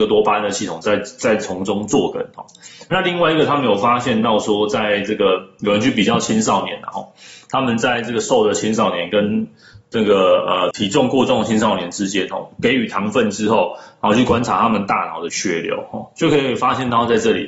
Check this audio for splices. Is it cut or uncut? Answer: cut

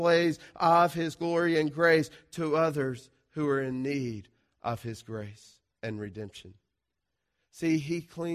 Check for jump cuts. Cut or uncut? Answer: uncut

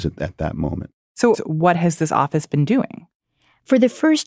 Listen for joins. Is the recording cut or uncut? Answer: cut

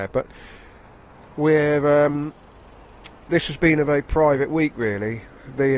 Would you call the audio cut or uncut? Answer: uncut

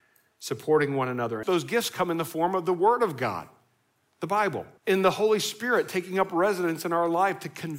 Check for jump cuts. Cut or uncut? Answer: cut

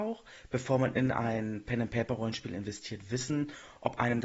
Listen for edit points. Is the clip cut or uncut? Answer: uncut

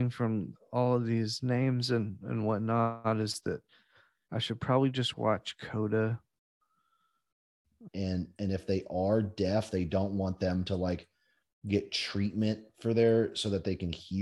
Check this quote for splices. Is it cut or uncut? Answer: cut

